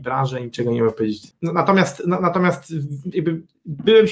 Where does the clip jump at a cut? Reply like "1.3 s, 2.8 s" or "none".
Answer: 1.3 s